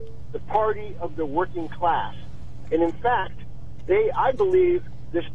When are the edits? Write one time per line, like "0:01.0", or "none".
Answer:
0:02.6